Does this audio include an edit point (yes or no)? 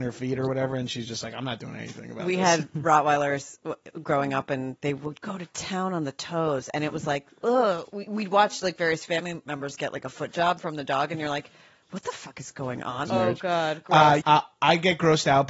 yes